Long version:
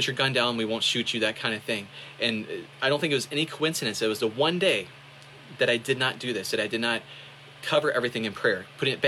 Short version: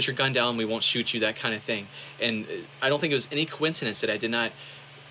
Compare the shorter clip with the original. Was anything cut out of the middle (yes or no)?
yes